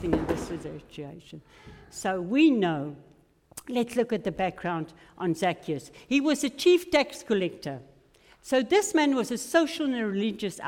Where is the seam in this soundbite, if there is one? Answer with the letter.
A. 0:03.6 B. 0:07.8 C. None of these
C